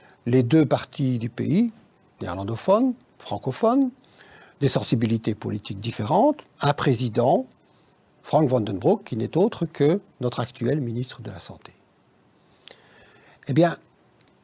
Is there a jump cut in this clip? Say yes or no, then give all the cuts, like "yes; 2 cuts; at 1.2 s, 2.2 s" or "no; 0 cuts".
no; 0 cuts